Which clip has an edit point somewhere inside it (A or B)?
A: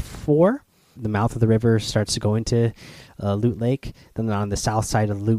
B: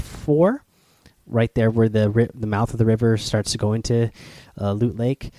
A